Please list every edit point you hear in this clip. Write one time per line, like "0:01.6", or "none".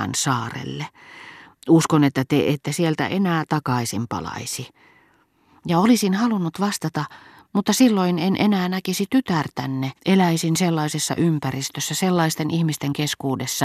0:10.0